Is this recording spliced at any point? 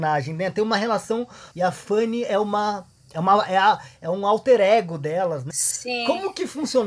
yes; 2 cuts; at 1.5 s, 5.5 s

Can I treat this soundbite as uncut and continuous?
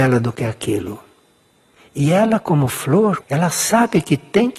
no; 1 cut; at 3.2 s

